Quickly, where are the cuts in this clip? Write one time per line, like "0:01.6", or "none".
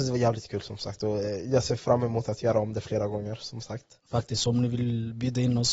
none